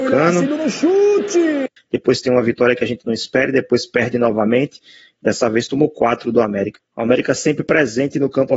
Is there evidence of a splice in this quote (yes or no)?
yes